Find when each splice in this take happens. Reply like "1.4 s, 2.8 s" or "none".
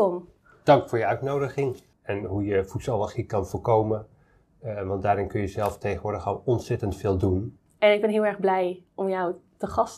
1.9 s, 7.7 s